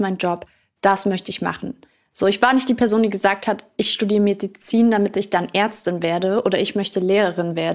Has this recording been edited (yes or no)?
no